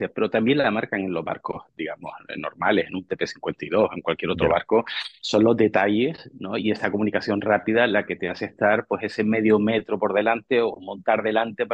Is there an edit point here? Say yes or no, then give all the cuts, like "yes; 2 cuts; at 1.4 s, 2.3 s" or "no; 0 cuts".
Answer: no; 0 cuts